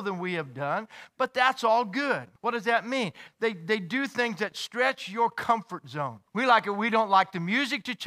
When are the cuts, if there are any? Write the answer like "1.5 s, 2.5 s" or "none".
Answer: 2.4 s, 6.3 s